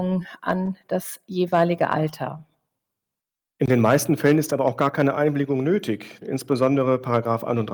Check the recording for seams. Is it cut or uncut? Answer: cut